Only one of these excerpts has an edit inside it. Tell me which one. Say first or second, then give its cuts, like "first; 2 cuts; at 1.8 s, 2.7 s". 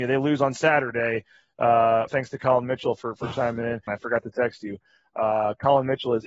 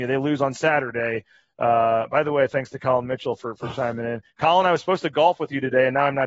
first; 2 cuts; at 2.1 s, 3.9 s